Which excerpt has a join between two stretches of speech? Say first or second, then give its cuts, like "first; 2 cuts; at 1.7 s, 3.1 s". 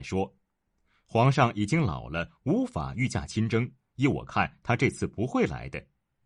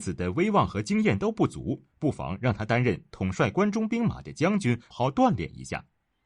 second; 1 cut; at 4.9 s